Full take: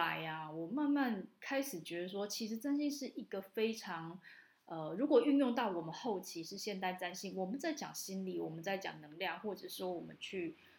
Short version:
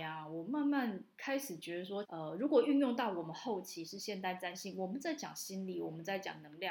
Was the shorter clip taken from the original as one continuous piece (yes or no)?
no